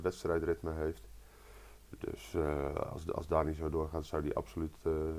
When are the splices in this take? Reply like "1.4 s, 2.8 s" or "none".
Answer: none